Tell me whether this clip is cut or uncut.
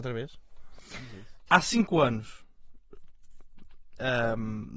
cut